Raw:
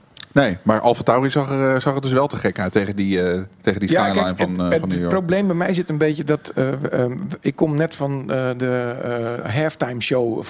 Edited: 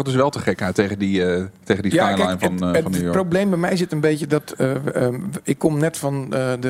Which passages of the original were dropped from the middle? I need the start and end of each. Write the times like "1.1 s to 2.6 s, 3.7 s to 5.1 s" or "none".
none

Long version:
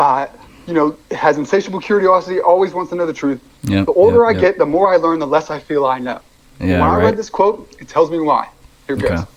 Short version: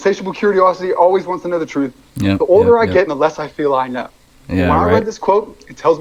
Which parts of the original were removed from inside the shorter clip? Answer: 4.5 s to 5.2 s

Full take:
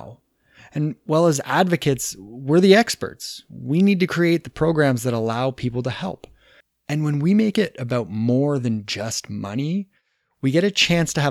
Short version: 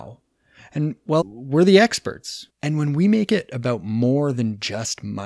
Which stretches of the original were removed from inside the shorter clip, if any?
1.2 s to 2.2 s, 3.5 s to 6.8 s

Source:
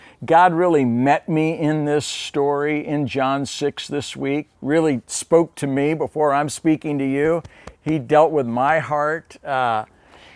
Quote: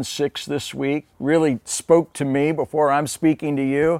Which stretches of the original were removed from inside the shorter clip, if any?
none

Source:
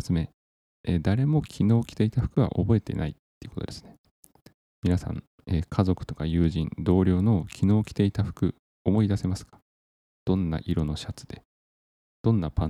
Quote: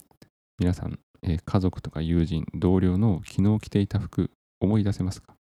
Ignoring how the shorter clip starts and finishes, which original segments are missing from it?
none

